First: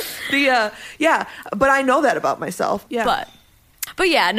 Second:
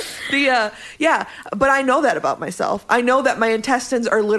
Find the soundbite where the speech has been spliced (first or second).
first